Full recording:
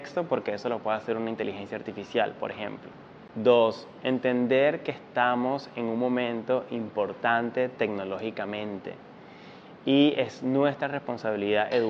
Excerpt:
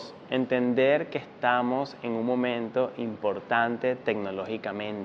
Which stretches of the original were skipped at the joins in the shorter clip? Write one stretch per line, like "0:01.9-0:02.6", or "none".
none